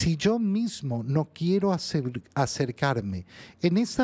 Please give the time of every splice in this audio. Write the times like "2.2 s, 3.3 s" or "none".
none